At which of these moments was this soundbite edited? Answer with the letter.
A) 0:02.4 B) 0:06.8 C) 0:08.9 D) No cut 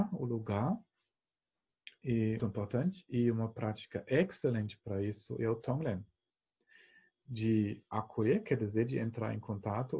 A